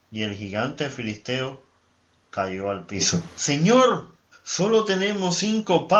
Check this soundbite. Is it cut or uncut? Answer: cut